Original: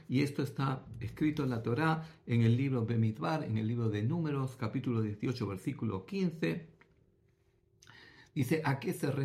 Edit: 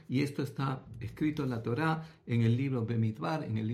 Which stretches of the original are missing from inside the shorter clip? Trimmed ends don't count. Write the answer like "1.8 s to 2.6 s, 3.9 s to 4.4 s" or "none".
none

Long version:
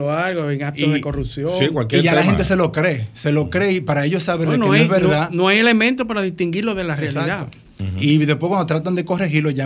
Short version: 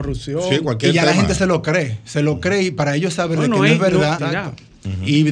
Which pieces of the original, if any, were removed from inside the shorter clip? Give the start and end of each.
5.3 s to 7.1 s

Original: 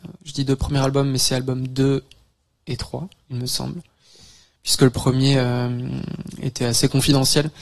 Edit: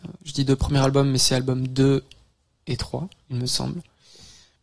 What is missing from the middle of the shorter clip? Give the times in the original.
none

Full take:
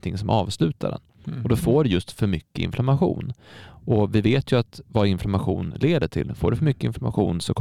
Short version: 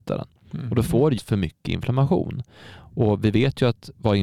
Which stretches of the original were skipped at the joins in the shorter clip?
1.9 s to 2.1 s

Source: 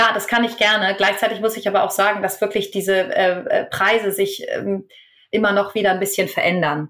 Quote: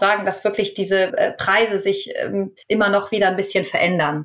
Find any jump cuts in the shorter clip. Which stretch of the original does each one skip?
3.1 s to 3.4 s, 5.0 s to 5.3 s

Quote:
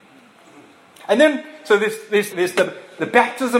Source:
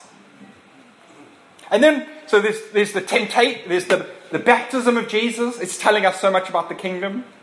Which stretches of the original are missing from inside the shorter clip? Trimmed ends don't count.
2.9 s to 3.6 s

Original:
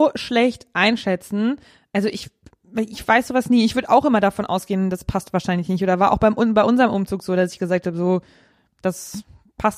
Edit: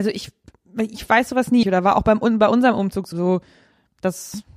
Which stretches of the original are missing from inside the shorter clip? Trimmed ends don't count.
3.6 s to 5.8 s, 7.3 s to 7.9 s

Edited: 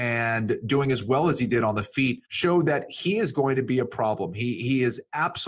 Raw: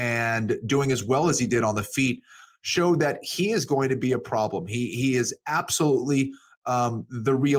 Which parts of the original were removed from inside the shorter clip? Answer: 2.2 s to 2.6 s

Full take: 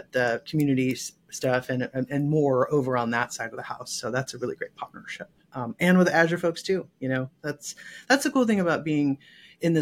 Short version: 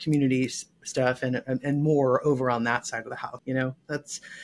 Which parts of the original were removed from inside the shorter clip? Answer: 3.9 s to 6.9 s

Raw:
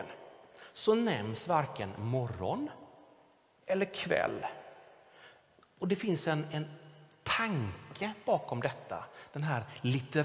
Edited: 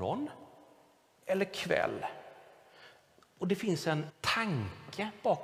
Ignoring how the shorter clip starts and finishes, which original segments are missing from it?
6.5 s to 7.1 s

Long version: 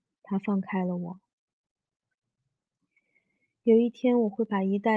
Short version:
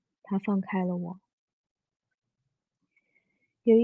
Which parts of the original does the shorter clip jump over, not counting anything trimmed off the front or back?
none

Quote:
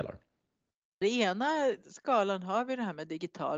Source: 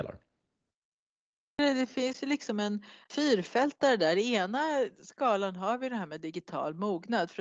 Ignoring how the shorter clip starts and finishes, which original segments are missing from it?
1.0 s to 4.1 s

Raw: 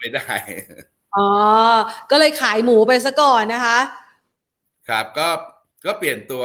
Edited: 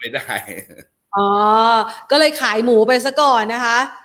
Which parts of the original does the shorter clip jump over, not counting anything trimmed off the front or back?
none

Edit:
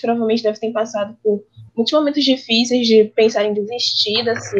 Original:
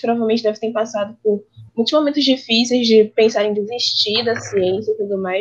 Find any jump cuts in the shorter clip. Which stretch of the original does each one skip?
none

